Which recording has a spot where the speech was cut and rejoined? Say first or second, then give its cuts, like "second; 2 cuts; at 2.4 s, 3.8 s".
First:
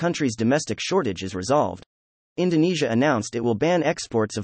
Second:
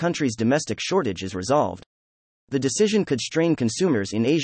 first; 1 cut; at 2.3 s